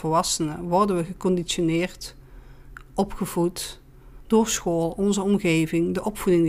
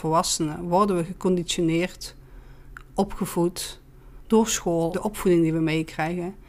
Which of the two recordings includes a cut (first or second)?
second